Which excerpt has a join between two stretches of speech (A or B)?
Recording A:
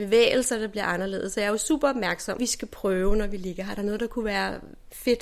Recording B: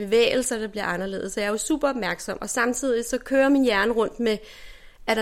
A